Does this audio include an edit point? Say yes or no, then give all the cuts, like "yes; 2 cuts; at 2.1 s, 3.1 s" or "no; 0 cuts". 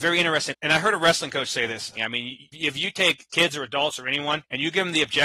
yes; 1 cut; at 2.0 s